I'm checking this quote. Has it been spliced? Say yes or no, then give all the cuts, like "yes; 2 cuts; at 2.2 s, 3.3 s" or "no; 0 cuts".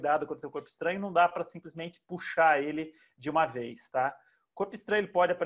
no; 0 cuts